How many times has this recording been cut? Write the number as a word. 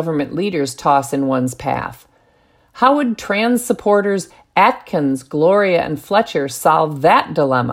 zero